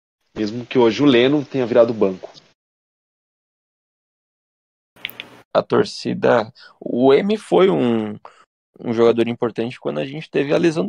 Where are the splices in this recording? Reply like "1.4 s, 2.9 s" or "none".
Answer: 5.5 s